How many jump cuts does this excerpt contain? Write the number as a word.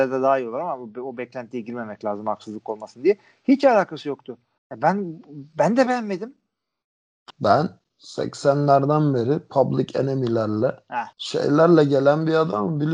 three